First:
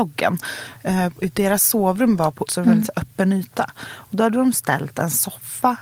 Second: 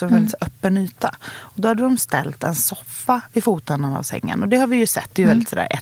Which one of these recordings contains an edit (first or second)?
first